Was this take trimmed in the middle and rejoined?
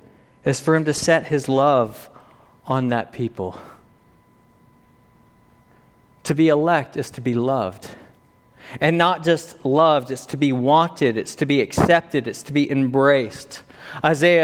no; 0 cuts

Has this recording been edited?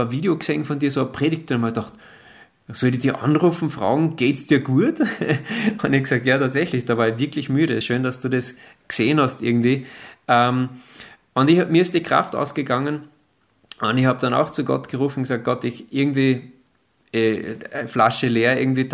no; 0 cuts

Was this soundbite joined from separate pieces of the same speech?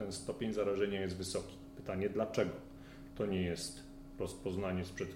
yes; 1 cut; at 3.1 s

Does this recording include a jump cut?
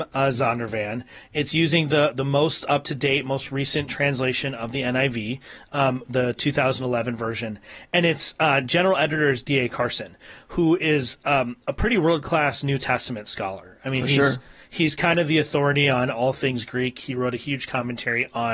no; 0 cuts

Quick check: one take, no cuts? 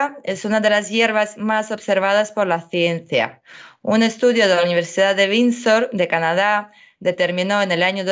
yes; 0 cuts

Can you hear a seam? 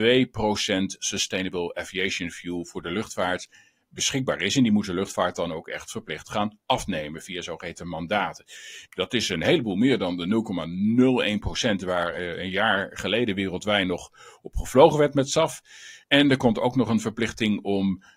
yes; 2 cuts; at 8.9 s, 16.0 s

